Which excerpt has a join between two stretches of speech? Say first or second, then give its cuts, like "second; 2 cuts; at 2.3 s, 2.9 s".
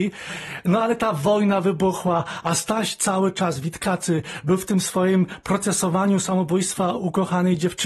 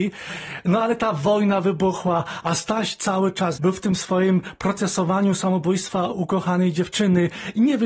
second; 1 cut; at 3.6 s